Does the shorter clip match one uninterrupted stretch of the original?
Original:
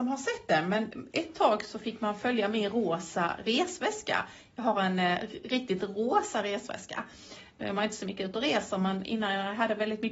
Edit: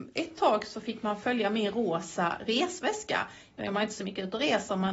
no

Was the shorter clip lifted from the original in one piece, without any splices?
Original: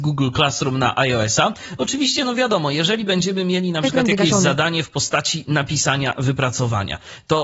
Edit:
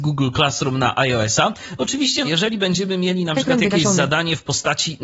no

